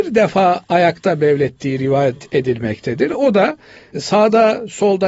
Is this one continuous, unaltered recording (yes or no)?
yes